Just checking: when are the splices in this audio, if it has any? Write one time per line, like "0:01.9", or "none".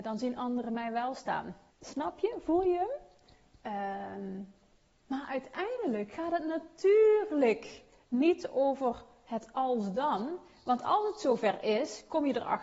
0:01.7